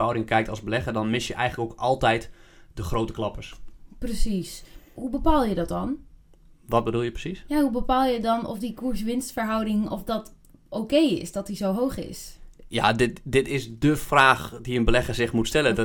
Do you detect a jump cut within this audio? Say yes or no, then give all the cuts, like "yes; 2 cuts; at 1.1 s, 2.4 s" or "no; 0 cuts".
no; 0 cuts